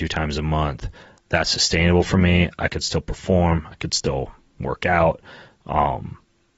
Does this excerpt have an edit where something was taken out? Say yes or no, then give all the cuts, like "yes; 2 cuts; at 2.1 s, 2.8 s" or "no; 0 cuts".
no; 0 cuts